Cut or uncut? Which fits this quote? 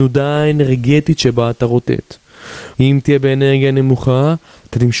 cut